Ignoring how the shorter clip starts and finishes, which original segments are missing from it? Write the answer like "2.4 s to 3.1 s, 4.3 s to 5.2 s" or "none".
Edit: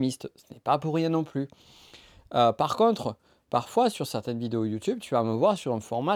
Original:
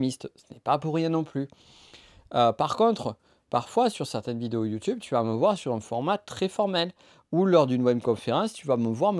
none